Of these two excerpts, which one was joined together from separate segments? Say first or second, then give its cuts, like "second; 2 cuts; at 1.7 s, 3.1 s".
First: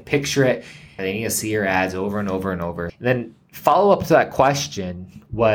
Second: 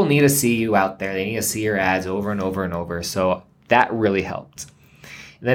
first; 2 cuts; at 1.0 s, 2.9 s